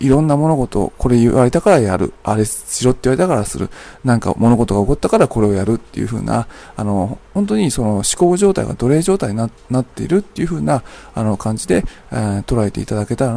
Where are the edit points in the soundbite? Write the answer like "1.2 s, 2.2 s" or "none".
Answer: none